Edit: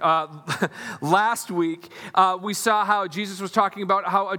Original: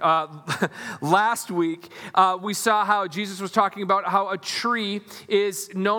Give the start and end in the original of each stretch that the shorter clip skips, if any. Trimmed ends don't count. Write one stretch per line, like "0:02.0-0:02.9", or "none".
none